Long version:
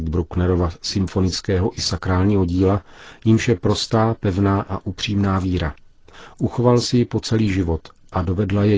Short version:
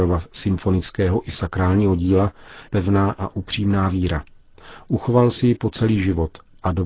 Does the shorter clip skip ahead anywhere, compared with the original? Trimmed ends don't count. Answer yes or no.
yes